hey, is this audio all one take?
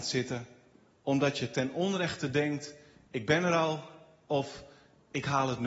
yes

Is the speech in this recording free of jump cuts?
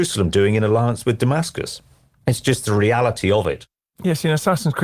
yes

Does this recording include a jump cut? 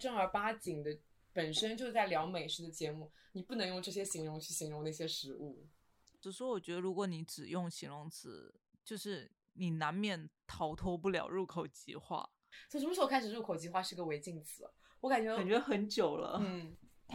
yes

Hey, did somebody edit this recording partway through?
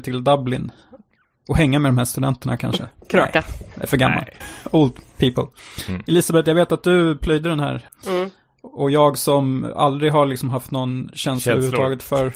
yes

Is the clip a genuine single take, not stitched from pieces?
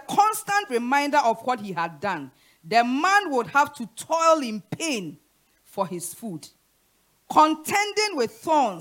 yes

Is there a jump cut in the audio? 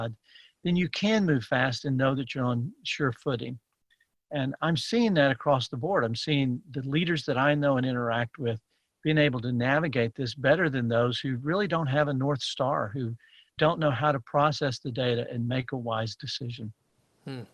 no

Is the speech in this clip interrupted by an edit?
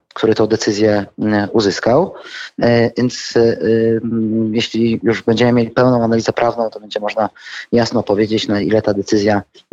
no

